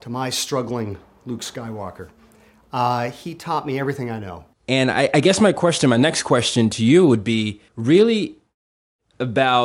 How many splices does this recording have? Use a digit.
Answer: 2